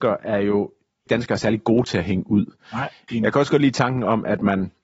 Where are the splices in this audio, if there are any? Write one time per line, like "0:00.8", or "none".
0:01.1
0:03.1